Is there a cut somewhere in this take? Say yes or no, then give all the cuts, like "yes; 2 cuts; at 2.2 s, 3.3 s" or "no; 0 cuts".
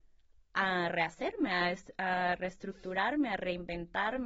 no; 0 cuts